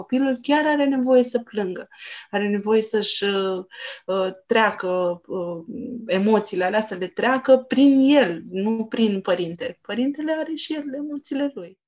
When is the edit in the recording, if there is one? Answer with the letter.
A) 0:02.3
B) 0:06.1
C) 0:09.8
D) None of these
D